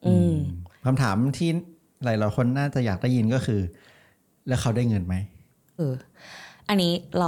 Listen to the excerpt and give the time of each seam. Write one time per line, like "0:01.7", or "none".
0:05.8